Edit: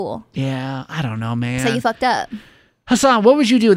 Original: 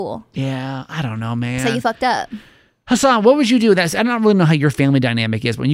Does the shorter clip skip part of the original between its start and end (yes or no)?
no